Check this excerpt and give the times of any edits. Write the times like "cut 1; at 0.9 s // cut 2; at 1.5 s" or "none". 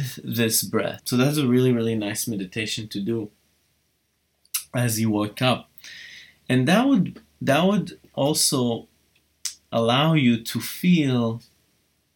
cut 1; at 1.0 s // cut 2; at 8.1 s